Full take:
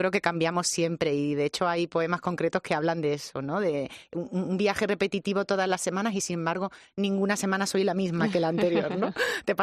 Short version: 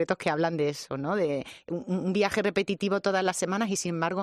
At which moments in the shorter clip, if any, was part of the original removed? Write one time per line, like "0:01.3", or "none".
none